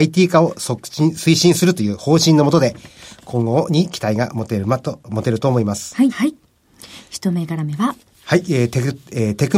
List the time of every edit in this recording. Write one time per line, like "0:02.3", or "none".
0:06.1